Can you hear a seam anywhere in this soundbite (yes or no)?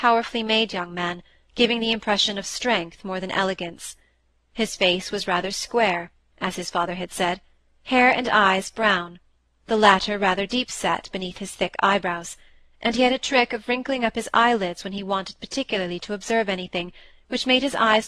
yes